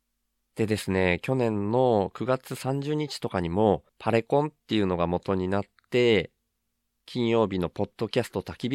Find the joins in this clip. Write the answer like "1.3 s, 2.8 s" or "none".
3.9 s

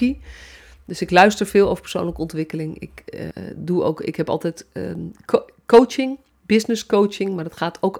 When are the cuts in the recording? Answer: 3.3 s

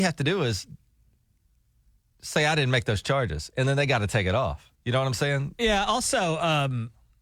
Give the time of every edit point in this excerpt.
4.7 s

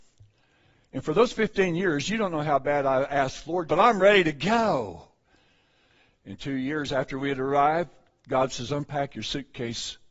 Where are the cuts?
3.7 s

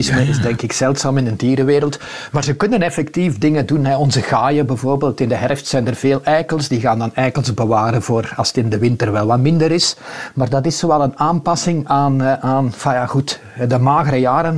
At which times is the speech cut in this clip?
none

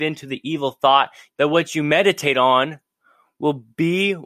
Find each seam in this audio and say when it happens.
1.3 s

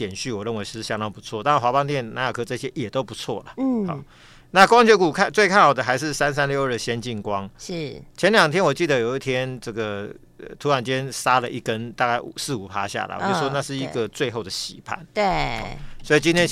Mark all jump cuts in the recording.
none

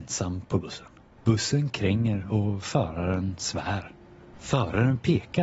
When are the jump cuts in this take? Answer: 1.2 s, 4.3 s

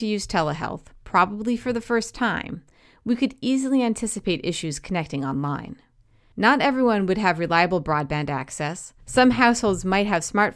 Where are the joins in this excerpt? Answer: none

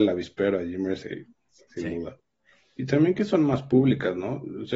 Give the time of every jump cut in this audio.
2.6 s

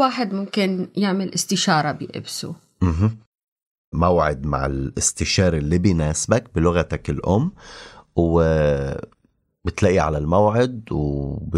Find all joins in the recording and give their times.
3.9 s

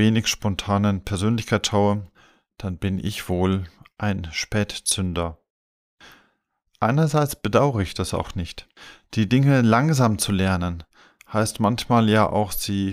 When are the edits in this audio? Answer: none

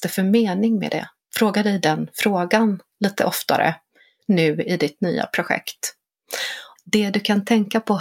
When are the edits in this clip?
6.8 s

